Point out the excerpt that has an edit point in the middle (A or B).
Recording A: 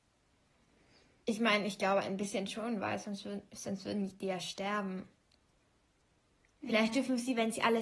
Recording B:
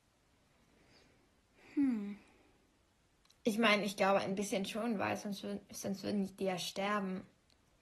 A